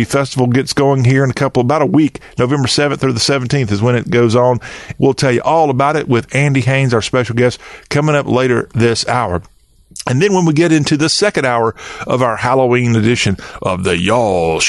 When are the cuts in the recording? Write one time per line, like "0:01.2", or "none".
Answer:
0:05.0